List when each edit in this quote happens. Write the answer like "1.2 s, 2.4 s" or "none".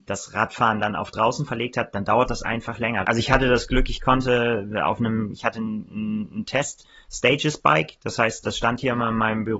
3.0 s